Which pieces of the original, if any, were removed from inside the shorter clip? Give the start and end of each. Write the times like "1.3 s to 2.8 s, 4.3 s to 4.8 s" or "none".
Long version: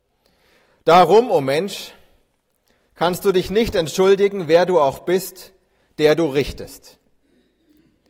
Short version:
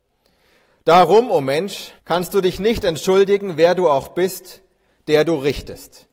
2.0 s to 2.9 s